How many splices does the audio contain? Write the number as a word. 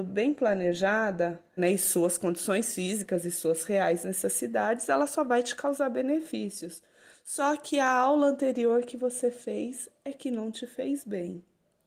one